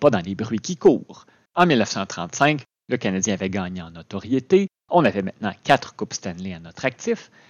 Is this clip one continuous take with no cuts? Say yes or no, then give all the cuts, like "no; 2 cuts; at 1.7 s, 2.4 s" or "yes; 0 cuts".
no; 1 cut; at 1.5 s